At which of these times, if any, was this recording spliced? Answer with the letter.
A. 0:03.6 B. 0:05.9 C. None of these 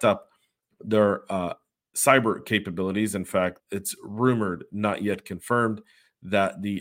A